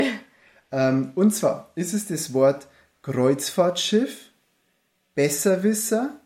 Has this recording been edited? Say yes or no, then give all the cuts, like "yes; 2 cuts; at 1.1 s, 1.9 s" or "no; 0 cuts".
no; 0 cuts